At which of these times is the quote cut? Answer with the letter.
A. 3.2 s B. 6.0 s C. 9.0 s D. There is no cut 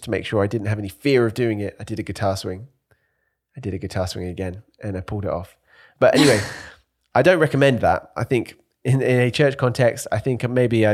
B